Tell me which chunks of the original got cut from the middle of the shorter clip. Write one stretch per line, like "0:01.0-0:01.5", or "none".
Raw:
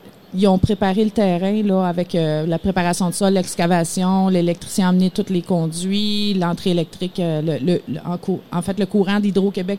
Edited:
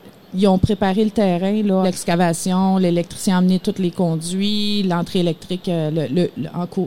0:01.8-0:03.3